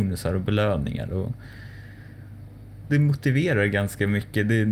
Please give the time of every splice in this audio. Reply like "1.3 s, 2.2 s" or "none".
2.9 s

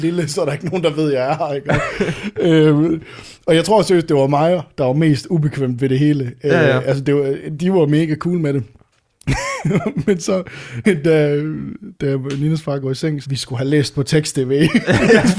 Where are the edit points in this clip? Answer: 10.8 s, 13.2 s

